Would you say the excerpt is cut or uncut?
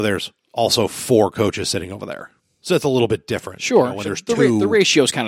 uncut